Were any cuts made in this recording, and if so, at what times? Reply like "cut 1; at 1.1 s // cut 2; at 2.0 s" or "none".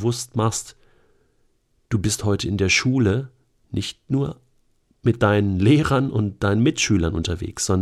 none